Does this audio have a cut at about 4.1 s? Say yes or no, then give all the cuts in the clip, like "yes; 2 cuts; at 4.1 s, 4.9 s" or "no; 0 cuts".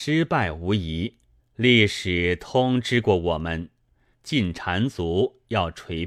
yes; 2 cuts; at 1.4 s, 4.1 s